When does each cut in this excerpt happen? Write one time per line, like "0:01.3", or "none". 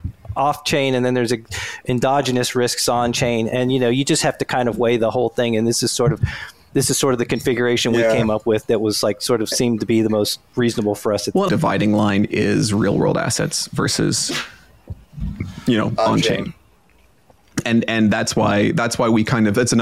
0:11.5